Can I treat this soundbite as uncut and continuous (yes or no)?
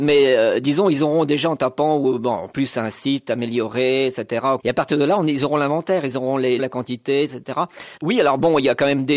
no